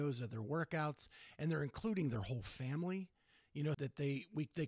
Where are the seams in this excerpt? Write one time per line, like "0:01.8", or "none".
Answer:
0:03.7